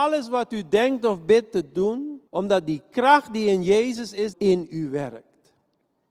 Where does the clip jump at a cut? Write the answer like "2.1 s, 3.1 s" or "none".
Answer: 2.3 s, 4.3 s

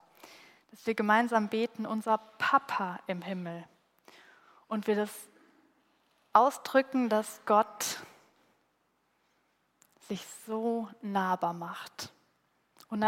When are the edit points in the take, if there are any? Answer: none

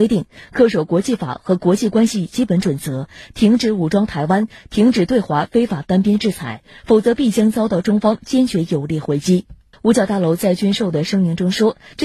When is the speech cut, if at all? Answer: 9.7 s

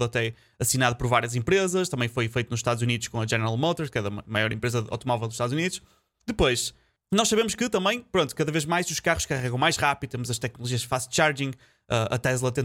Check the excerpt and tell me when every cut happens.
6.1 s

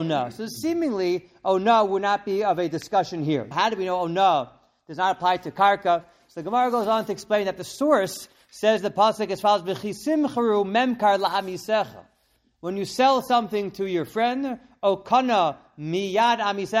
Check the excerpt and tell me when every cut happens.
3.5 s

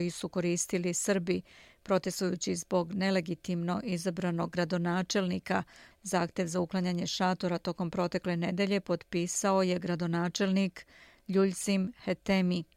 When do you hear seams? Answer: 5.9 s

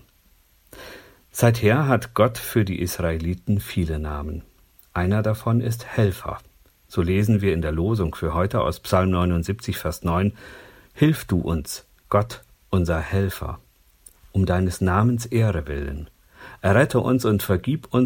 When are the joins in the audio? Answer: none

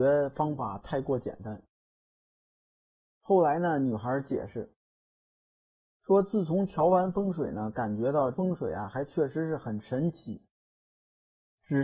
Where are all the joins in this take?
none

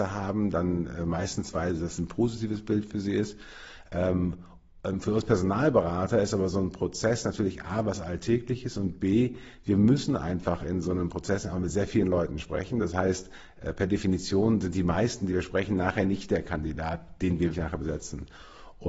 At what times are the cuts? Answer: 17.5 s

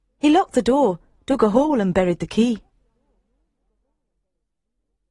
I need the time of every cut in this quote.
none

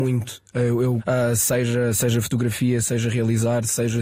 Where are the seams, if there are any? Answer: 1.0 s

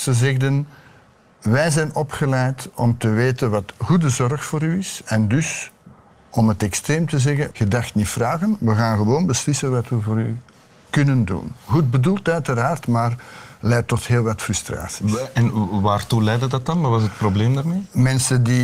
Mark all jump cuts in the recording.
7.5 s

